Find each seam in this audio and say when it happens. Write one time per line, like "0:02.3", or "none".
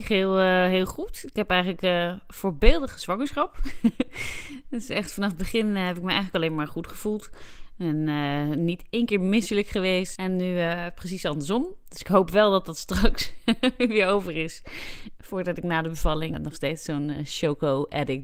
0:10.2
0:16.3